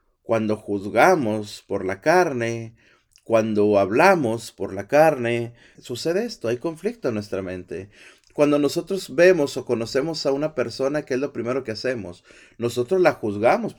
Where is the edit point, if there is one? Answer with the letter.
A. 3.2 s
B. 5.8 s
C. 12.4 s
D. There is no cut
B